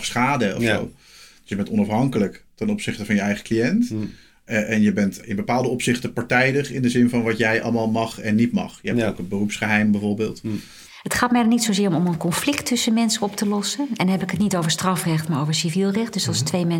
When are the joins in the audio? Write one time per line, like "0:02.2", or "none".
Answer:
0:05.2